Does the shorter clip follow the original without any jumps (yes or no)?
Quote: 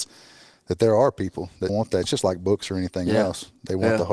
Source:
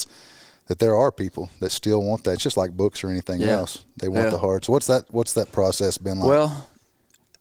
no